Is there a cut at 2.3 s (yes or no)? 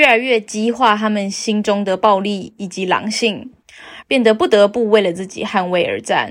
no